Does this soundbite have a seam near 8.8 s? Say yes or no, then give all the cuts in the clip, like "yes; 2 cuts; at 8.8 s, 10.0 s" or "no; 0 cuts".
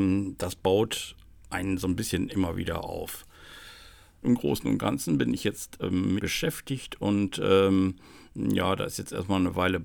no; 2 cuts; at 4.2 s, 6.2 s